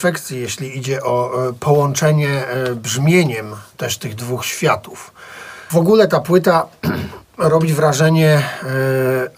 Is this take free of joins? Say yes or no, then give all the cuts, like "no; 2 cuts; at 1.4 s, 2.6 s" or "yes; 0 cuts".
no; 1 cut; at 5.7 s